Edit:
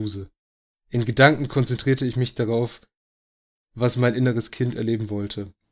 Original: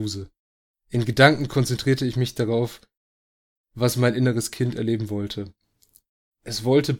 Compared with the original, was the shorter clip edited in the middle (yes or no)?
no